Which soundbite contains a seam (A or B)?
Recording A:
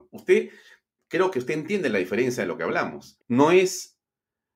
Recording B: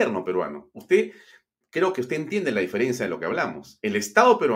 A